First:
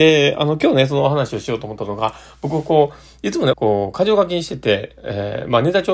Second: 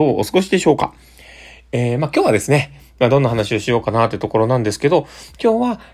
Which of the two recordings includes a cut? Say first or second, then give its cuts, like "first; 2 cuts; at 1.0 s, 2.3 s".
first; 1 cut; at 3.5 s